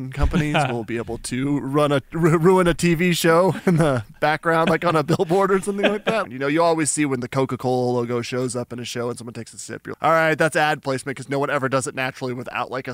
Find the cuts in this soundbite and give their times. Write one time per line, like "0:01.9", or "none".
0:06.2
0:09.9